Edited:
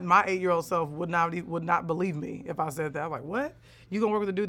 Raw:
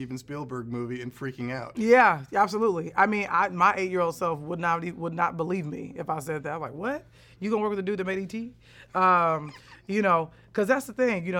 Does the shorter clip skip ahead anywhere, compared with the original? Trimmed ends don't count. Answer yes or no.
no